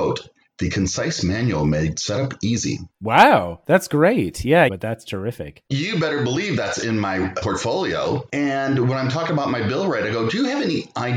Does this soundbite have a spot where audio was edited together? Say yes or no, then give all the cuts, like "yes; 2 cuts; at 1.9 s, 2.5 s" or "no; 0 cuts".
yes; 2 cuts; at 4.7 s, 7.4 s